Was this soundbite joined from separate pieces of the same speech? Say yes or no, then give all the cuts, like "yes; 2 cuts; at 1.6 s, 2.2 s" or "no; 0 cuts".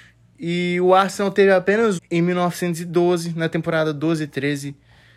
yes; 1 cut; at 2.0 s